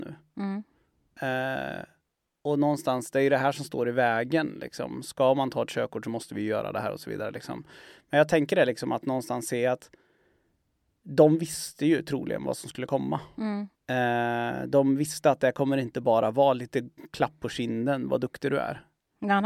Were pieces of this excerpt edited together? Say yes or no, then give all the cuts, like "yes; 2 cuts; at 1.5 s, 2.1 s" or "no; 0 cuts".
yes; 1 cut; at 13.7 s